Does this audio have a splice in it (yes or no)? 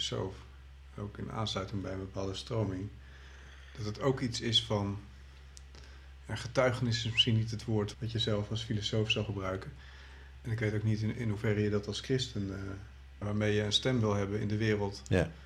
yes